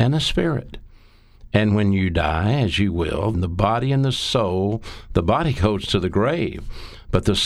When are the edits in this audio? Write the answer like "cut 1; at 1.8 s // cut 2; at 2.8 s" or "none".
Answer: cut 1; at 3.3 s